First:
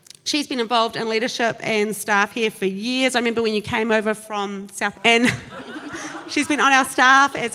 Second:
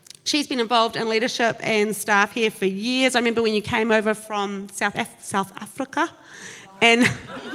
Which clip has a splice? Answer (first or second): first